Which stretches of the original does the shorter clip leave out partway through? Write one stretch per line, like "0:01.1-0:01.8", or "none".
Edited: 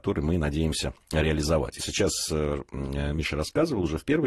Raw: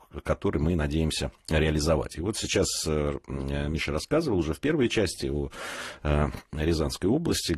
0:02.2-0:02.3